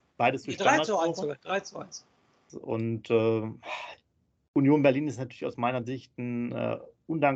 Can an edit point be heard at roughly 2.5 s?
yes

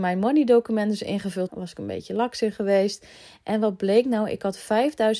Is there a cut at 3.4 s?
no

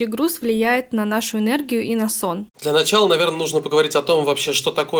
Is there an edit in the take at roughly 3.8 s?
no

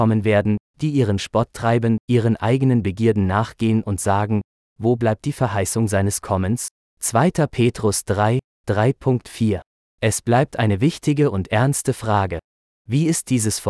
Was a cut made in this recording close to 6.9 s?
yes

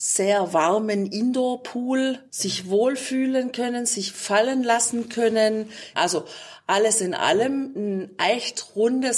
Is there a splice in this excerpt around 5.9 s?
yes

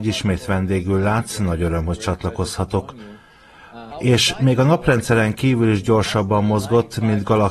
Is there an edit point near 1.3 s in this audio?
no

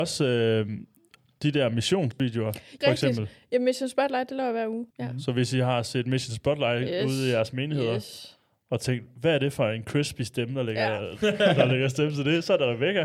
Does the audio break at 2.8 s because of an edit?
yes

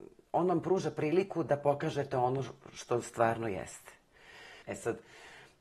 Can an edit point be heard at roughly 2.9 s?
no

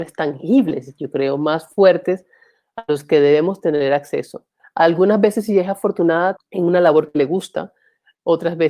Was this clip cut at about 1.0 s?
no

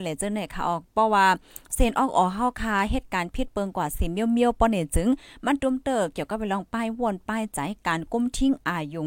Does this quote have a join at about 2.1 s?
no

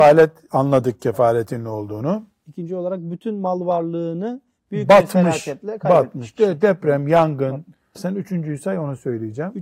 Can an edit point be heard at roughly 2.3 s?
no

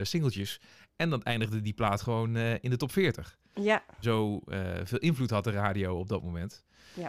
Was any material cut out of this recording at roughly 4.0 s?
yes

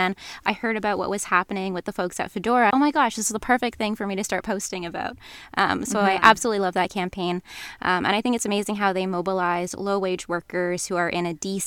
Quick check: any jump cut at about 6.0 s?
no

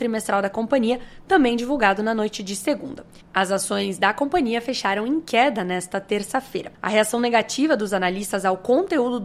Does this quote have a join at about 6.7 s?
yes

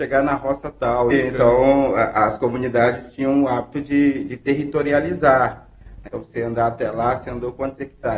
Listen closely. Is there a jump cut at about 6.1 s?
yes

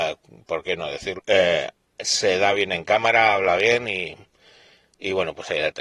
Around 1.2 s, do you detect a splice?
yes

